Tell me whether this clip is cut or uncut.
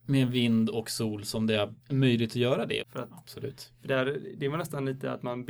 cut